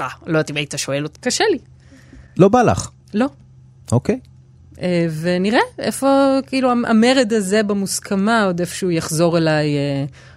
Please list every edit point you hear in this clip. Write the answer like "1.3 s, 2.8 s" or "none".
1.1 s